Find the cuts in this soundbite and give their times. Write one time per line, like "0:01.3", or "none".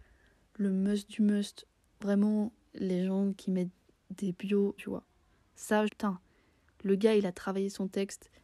0:04.8
0:05.9